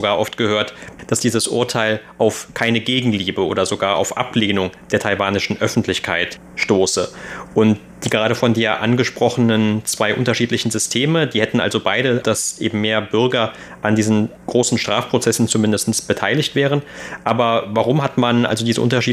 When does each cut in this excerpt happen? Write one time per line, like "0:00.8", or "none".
0:07.5
0:12.2